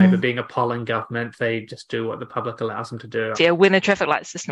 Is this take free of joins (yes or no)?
no